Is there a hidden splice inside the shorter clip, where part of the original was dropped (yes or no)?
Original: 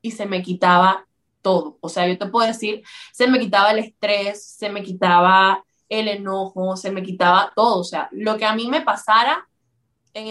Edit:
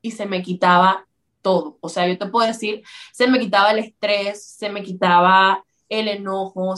no